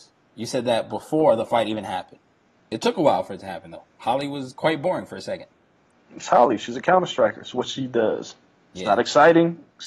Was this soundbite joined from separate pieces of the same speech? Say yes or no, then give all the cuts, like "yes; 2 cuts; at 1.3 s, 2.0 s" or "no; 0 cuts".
yes; 1 cut; at 2.6 s